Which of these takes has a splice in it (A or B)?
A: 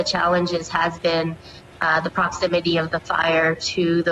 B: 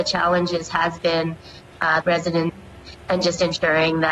B